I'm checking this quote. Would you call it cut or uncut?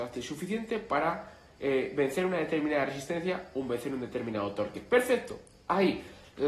uncut